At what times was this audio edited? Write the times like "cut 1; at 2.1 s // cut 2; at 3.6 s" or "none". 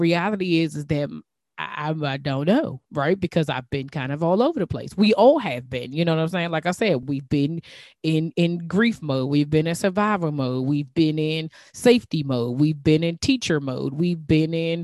none